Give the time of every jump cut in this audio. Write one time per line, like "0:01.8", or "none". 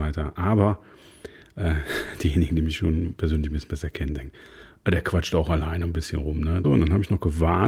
0:06.6